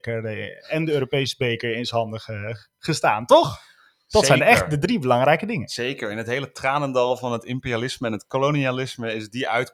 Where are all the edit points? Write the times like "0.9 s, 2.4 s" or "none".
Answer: none